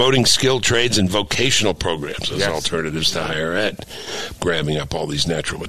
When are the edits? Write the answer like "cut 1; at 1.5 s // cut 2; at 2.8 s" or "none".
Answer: cut 1; at 4.4 s